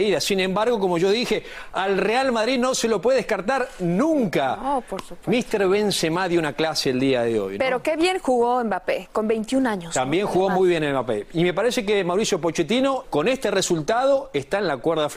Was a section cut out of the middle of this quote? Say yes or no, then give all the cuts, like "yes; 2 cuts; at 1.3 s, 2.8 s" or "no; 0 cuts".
yes; 1 cut; at 13.0 s